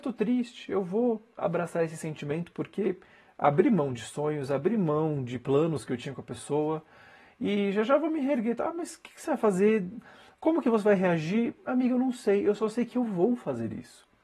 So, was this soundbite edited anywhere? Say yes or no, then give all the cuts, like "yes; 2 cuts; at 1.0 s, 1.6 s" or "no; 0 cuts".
no; 0 cuts